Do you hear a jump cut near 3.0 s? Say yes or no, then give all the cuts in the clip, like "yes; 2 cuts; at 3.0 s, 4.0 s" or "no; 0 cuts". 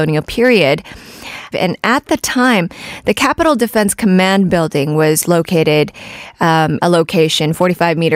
no; 2 cuts; at 1.5 s, 6.8 s